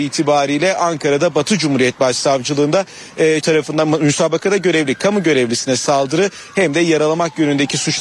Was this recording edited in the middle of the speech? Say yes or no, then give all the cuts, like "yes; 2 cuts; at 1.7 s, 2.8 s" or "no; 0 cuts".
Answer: yes; 1 cut; at 3.4 s